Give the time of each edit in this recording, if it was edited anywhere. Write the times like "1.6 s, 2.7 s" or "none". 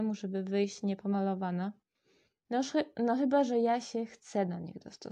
2.4 s